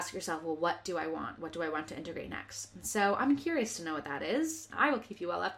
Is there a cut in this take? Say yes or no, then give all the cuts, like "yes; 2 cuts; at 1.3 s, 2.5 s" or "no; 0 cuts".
no; 0 cuts